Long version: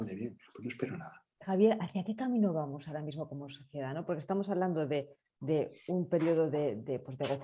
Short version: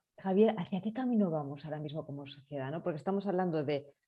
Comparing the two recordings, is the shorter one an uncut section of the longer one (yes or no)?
yes